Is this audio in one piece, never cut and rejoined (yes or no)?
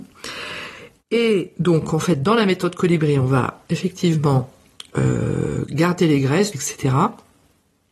no